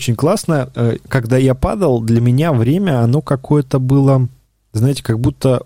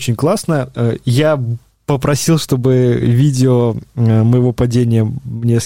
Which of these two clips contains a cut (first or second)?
first